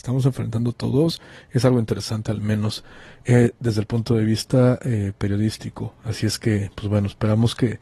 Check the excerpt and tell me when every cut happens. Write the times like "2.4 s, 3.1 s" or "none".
none